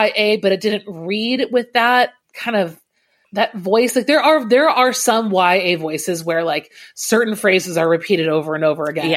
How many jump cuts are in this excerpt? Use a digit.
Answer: 1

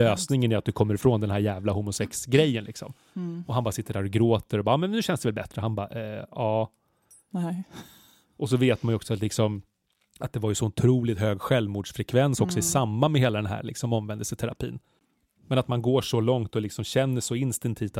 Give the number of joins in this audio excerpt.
0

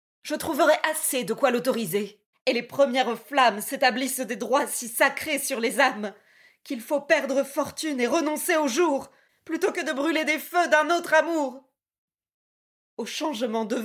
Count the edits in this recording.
1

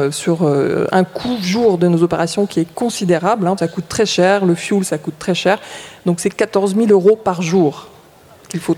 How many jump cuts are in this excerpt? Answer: 1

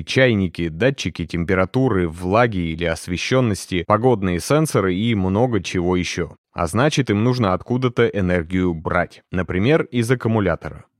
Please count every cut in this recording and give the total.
2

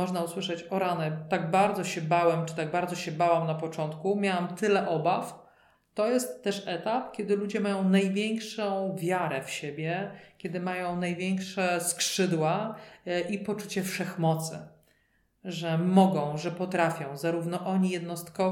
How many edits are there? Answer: 1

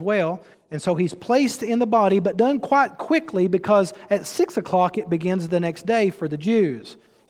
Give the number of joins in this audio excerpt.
0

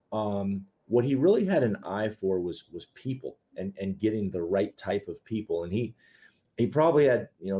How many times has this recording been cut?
0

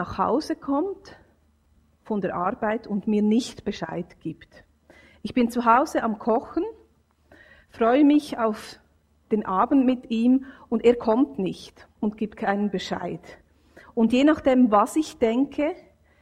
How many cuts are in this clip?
1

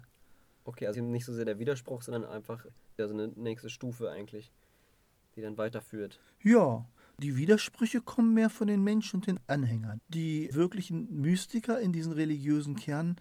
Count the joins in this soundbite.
1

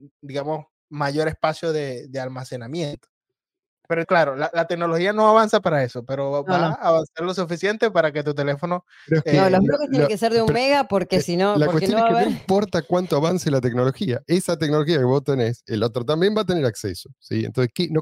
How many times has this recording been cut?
1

